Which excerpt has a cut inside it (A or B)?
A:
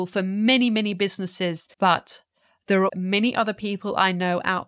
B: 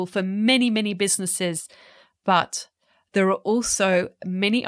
A